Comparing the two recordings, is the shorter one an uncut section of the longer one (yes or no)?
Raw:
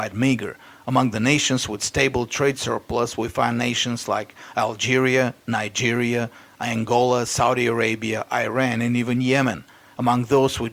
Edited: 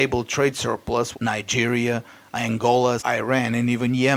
no